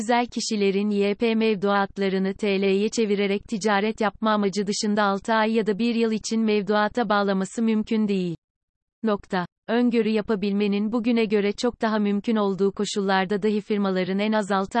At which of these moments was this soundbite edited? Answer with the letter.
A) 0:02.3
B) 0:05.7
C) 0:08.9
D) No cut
C